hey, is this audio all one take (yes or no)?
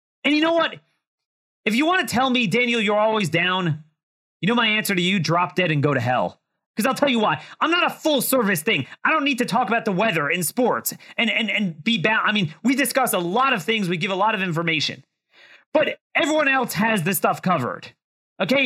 yes